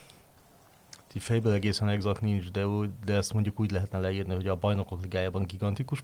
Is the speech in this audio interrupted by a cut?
no; 0 cuts

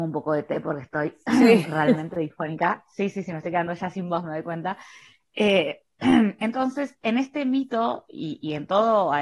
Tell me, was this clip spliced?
no; 0 cuts

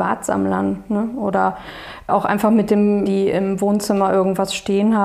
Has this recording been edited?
yes; 1 cut; at 3.1 s

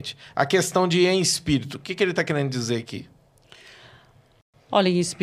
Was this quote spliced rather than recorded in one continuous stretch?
no; 0 cuts

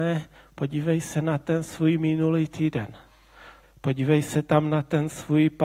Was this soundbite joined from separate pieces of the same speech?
yes; 1 cut; at 3.6 s

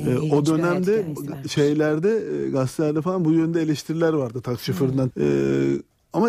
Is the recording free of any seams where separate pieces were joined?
no; 1 cut; at 5.1 s

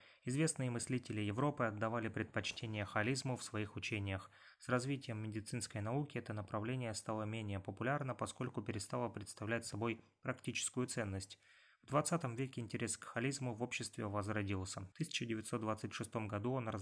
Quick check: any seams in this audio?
yes; 1 cut; at 14.9 s

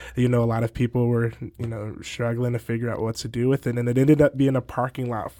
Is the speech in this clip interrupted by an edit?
no; 0 cuts

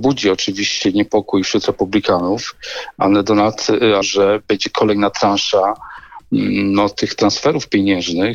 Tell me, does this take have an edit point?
yes; 2 cuts; at 1.4 s, 4.0 s

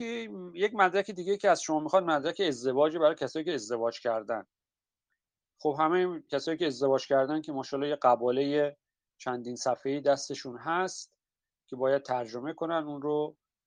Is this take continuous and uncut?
no; 1 cut; at 6.3 s

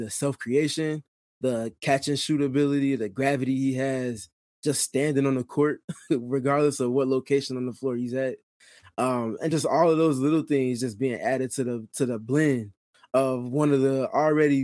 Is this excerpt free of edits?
yes; 0 cuts

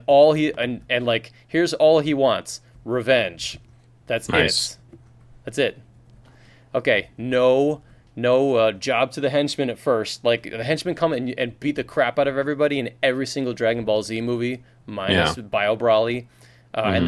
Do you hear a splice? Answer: no; 0 cuts

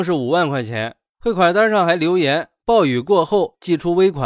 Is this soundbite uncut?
yes; 0 cuts

